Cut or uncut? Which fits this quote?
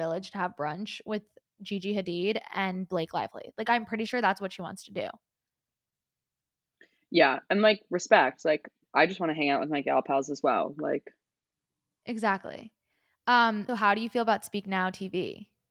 cut